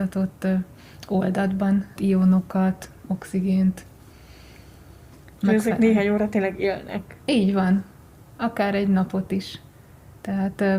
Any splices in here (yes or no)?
yes